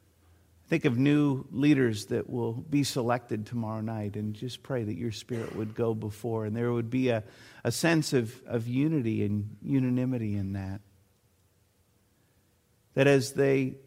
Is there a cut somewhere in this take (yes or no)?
no